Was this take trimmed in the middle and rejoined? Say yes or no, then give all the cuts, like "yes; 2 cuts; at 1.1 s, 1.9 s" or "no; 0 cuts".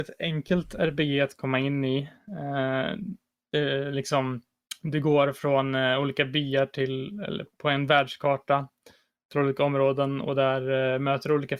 yes; 1 cut; at 7.5 s